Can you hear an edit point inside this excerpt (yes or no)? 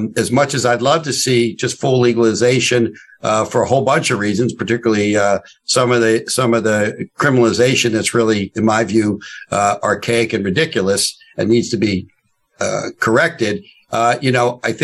no